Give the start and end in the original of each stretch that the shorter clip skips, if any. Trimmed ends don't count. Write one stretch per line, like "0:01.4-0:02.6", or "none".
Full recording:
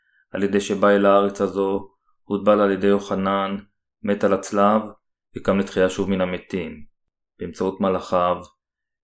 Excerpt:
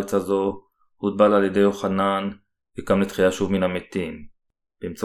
0:03.9-0:05.3